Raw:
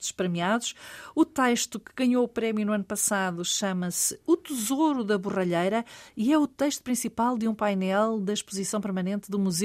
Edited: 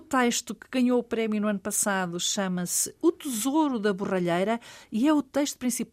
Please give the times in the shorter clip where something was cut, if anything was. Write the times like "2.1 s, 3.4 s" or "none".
none